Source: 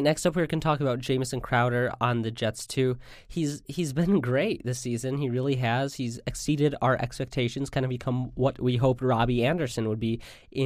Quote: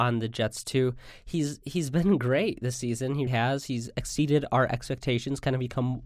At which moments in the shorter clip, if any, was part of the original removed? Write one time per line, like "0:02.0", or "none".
0:03.3